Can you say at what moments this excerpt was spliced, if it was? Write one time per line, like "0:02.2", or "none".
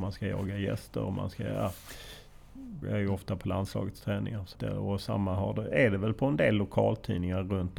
0:02.8
0:04.6